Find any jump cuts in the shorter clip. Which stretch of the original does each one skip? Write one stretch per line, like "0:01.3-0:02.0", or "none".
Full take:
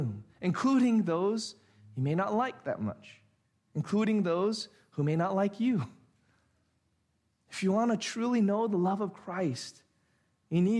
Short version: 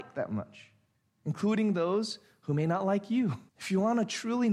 0:06.0-0:07.4